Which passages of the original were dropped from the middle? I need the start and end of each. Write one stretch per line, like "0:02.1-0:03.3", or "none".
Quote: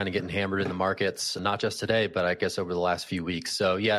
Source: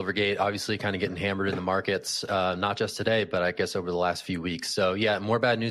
0:02.3-0:02.6